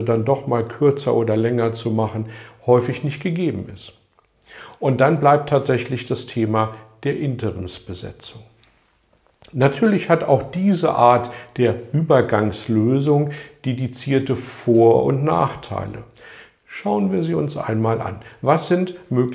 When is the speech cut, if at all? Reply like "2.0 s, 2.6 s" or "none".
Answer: none